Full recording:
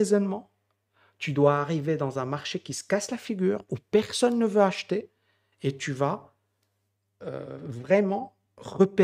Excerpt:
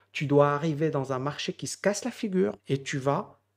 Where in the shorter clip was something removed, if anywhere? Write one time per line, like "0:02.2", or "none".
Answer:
0:02.6